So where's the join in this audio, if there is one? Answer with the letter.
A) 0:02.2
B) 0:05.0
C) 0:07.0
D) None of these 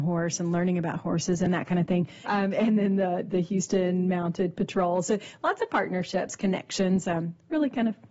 A